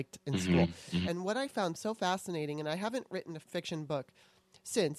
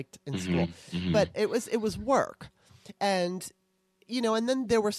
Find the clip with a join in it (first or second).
first